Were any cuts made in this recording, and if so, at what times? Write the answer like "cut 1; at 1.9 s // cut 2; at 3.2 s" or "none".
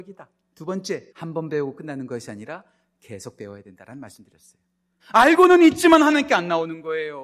cut 1; at 1.1 s // cut 2; at 5.0 s